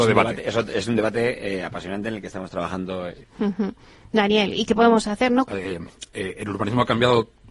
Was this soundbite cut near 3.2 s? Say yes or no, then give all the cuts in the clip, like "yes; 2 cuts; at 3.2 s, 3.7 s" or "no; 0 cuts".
yes; 2 cuts; at 3.2 s, 5.5 s